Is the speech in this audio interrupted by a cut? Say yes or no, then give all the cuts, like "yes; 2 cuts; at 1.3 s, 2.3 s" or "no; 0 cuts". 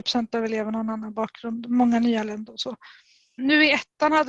yes; 1 cut; at 3.4 s